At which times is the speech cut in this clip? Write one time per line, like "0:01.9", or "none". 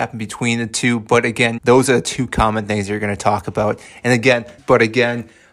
0:01.6
0:04.6